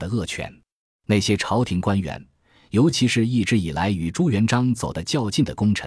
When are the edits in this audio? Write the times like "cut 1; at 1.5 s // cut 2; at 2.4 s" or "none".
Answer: cut 1; at 0.9 s